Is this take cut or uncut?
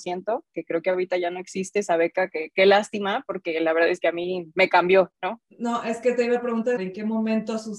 cut